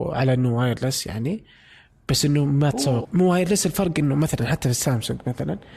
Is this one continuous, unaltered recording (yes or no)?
no